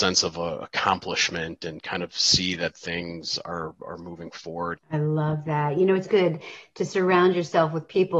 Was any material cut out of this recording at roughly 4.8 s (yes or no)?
yes